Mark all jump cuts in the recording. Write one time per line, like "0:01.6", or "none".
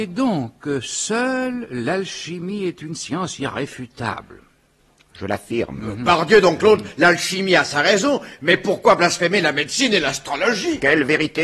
none